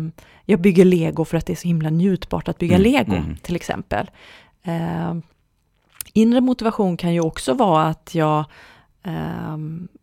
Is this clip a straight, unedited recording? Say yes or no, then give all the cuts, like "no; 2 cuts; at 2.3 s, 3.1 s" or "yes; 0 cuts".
yes; 0 cuts